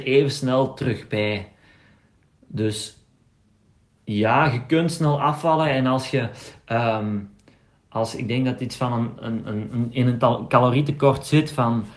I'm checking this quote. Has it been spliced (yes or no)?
no